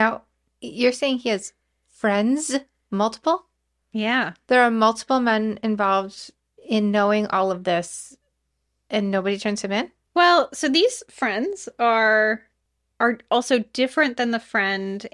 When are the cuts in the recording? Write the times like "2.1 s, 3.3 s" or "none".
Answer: none